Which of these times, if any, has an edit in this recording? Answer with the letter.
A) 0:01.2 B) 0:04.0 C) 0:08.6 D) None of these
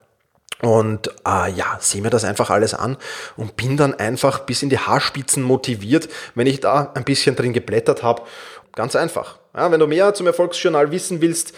C